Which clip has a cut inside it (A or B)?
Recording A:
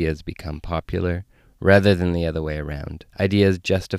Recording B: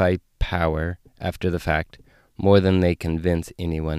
A